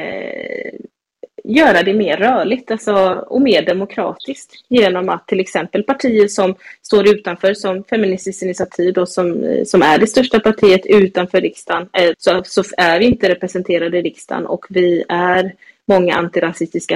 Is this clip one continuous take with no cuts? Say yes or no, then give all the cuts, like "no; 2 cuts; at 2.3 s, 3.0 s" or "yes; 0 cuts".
no; 1 cut; at 12.1 s